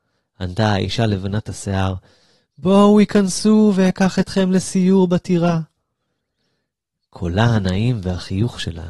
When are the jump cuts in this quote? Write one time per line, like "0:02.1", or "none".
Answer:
none